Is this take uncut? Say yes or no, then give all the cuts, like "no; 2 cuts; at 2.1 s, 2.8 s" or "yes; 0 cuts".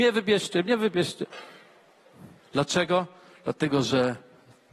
no; 1 cut; at 2.4 s